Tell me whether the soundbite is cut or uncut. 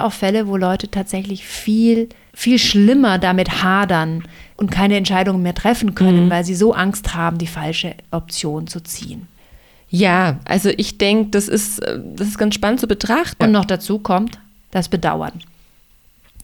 cut